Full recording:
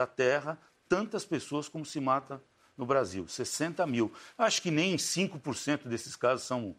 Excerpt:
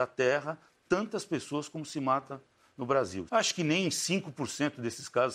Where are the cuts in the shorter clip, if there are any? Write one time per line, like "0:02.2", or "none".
0:03.3